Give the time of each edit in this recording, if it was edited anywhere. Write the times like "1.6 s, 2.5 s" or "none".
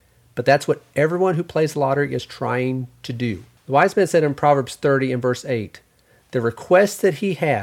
3.6 s